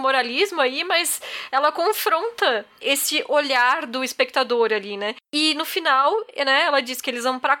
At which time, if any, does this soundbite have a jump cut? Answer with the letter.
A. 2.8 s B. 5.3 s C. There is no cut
A